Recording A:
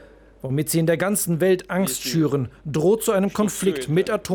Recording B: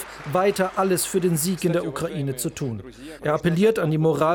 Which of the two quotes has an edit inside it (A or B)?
B